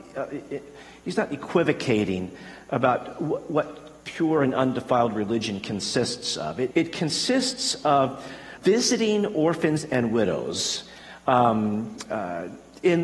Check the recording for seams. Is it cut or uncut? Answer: cut